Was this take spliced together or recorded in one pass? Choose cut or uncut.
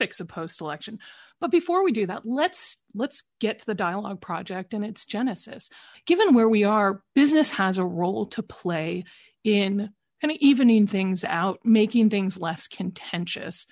cut